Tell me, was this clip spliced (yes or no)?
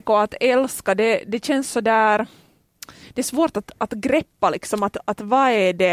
no